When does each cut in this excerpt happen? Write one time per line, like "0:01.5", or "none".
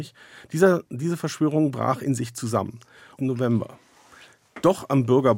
0:03.2

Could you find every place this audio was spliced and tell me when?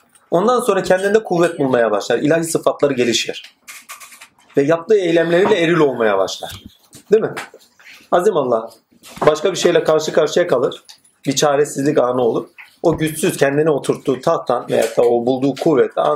none

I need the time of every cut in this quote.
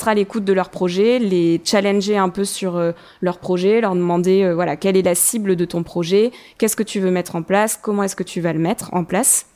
none

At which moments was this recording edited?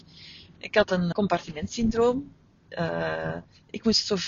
0:01.1
0:02.6

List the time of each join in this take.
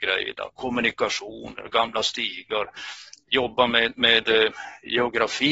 none

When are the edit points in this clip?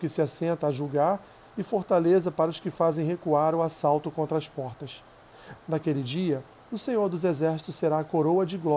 0:05.6

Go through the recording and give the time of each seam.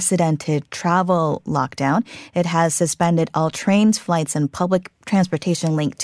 none

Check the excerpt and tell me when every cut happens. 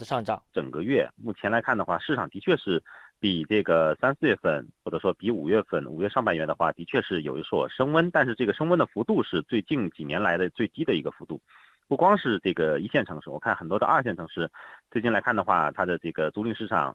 none

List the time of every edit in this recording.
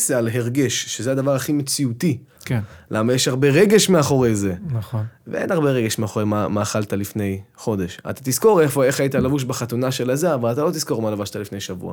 0:02.4

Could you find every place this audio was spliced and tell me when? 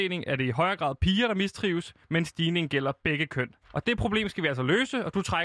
0:03.6

